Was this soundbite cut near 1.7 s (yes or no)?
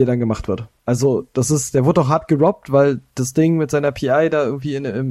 no